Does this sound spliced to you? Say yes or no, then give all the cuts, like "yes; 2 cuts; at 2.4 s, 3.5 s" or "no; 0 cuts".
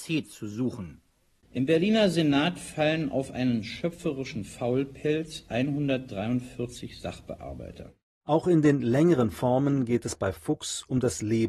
yes; 1 cut; at 1.4 s